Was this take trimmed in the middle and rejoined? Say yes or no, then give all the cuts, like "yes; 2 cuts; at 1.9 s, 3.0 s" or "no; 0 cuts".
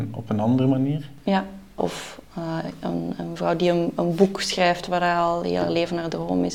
yes; 1 cut; at 1.8 s